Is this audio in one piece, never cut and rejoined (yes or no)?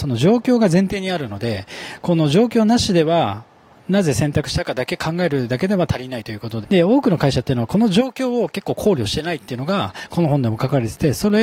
no